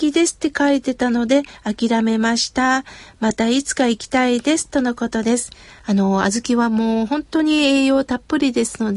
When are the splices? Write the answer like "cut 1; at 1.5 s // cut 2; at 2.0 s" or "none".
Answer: cut 1; at 5.8 s